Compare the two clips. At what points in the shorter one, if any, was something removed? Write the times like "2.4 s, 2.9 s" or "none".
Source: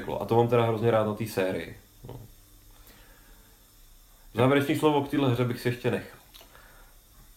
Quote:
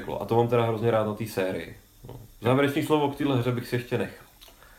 2.3 s